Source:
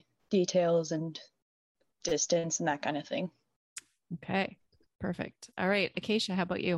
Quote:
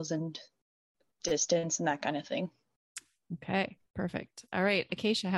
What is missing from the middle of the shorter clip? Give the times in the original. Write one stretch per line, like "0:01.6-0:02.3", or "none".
0:04.7-0:04.9